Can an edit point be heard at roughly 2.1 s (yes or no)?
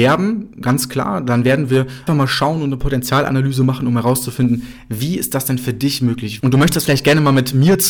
yes